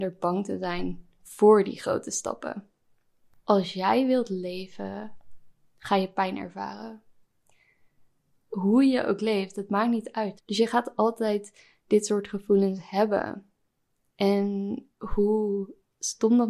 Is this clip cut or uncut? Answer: cut